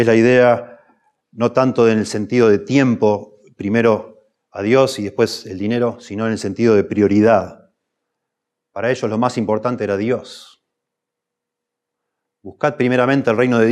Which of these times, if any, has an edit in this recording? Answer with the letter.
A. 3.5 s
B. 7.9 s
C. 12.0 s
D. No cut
D